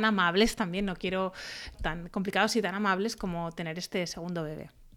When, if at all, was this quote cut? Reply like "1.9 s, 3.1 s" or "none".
1.7 s

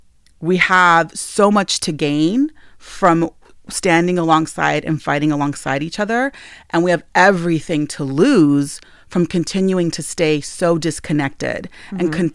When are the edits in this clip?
none

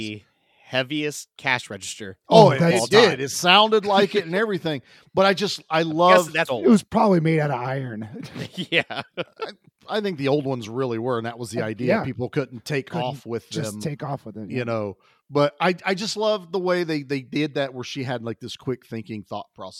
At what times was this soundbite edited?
6.5 s

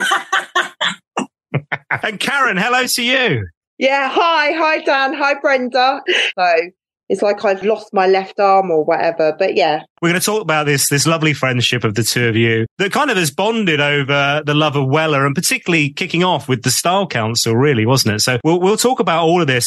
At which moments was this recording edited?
6.3 s

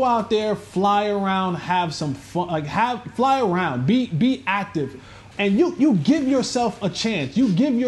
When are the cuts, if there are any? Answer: 5.3 s

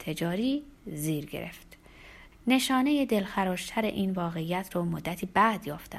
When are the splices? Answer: 2.3 s

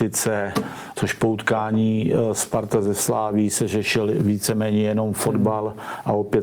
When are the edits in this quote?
0.9 s

